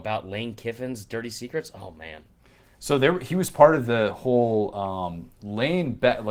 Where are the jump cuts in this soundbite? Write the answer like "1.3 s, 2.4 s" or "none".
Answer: 5.3 s